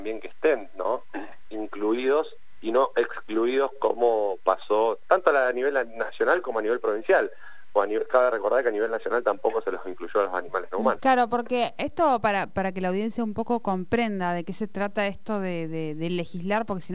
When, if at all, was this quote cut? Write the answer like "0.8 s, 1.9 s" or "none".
11.0 s